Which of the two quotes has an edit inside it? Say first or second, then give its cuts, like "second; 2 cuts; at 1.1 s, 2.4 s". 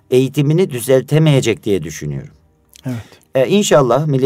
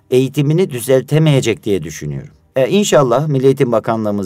second; 1 cut; at 2.5 s